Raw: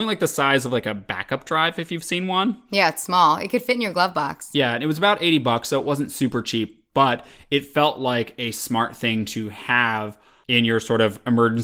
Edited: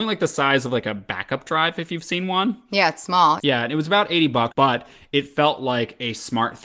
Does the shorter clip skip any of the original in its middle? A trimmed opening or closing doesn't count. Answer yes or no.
yes